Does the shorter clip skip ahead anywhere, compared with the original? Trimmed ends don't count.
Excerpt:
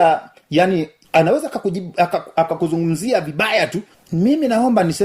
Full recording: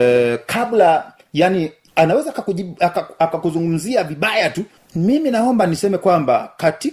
no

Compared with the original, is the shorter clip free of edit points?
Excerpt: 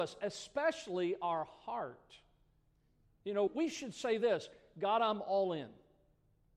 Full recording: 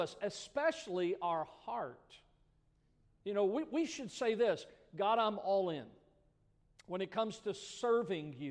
no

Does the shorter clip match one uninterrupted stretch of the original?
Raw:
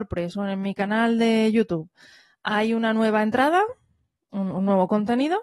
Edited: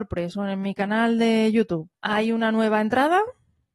no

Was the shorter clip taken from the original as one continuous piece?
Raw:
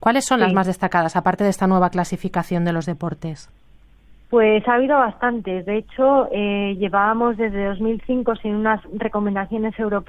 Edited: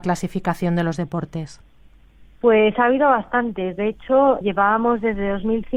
no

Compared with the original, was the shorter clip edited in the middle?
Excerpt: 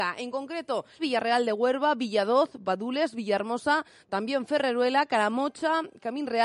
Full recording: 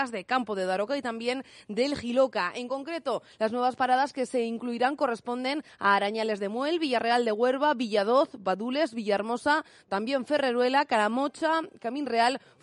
yes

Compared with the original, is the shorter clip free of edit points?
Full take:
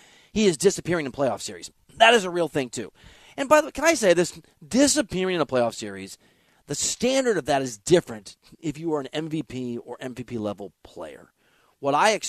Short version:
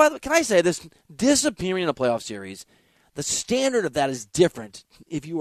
yes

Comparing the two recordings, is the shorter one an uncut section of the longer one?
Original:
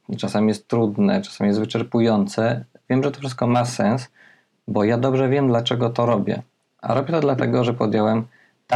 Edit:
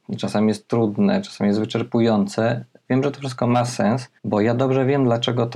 no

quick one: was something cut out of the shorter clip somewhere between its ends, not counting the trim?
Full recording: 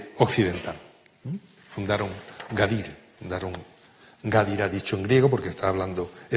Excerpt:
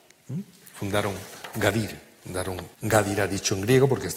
yes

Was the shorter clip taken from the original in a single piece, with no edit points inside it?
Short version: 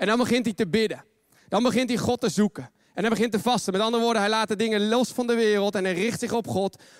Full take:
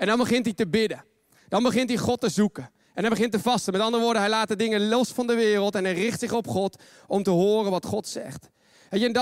yes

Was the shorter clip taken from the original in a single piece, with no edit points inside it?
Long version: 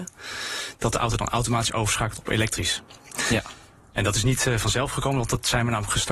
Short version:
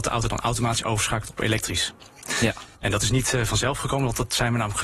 no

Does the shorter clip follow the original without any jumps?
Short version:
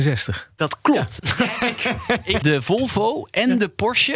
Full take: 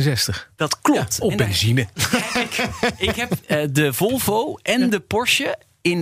no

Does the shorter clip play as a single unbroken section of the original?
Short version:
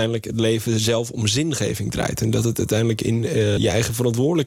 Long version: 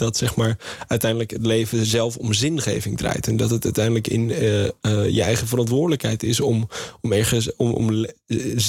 no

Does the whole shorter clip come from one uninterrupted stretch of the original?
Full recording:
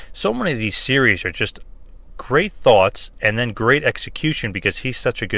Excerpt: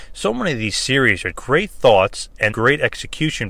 no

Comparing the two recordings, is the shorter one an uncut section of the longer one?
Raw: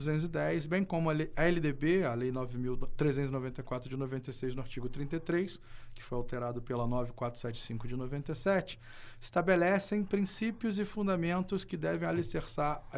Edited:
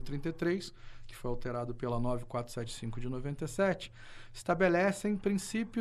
yes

